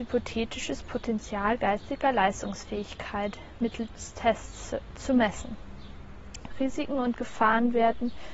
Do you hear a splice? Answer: yes; 1 cut; at 6.5 s

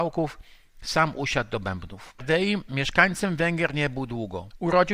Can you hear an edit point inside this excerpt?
yes; 1 cut; at 2.2 s

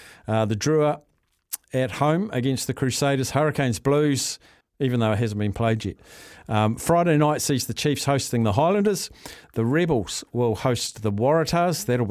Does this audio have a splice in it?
yes; 1 cut; at 4.6 s

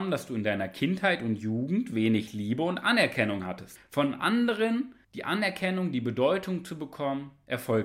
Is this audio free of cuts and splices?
no; 2 cuts; at 3.8 s, 5.0 s

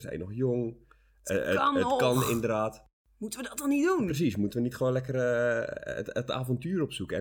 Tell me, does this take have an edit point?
no; 0 cuts

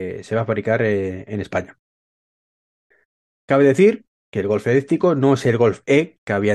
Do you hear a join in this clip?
no; 0 cuts

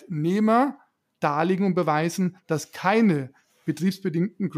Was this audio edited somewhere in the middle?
no; 0 cuts

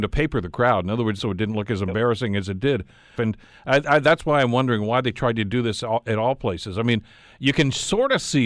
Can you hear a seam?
yes; 2 cuts; at 1.2 s, 3.2 s

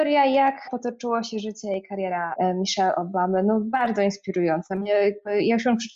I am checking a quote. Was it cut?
no; 0 cuts

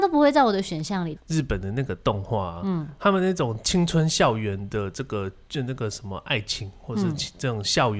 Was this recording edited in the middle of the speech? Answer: yes; 1 cut; at 1.2 s

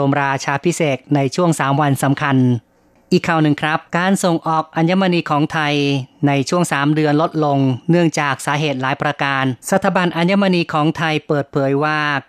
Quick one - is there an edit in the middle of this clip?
yes; 2 cuts; at 3.9 s, 9.6 s

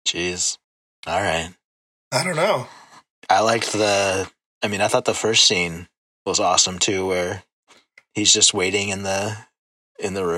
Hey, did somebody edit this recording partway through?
no; 0 cuts

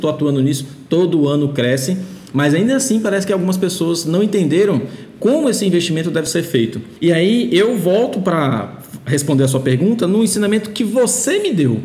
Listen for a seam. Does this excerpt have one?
no; 0 cuts

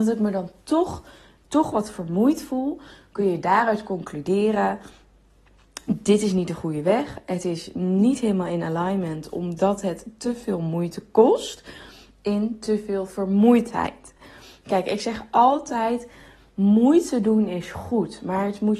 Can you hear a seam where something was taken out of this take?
no; 0 cuts

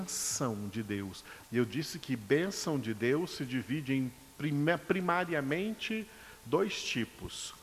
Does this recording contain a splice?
yes; 1 cut; at 1.4 s

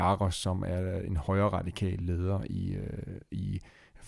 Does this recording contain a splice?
no; 0 cuts

